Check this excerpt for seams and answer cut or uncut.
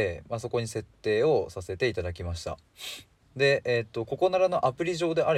cut